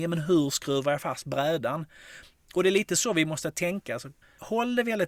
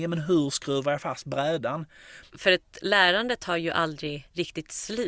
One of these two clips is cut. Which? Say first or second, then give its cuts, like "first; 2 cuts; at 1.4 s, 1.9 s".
second; 1 cut; at 2.3 s